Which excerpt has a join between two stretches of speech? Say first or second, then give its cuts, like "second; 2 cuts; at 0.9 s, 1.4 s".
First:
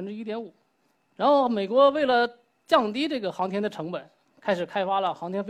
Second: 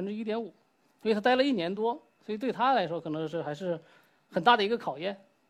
first; 1 cut; at 0.9 s